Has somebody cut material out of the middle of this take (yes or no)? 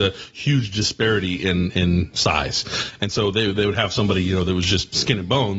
no